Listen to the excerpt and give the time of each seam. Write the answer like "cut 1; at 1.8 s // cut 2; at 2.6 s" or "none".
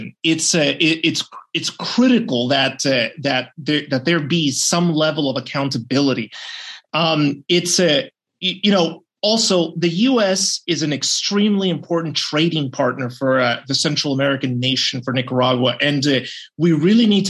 none